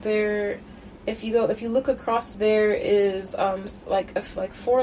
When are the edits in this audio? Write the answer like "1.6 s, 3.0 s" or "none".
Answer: 2.3 s